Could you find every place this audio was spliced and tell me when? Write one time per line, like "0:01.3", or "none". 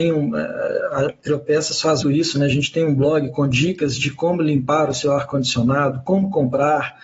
0:02.0